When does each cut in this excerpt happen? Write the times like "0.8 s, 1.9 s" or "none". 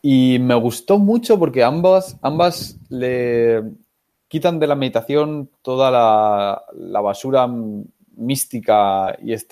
none